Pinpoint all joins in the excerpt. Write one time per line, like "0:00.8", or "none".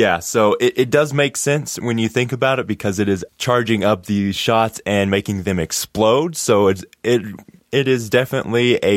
0:03.3